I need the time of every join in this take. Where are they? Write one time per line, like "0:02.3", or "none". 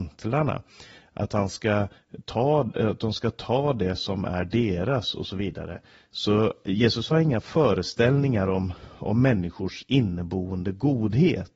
none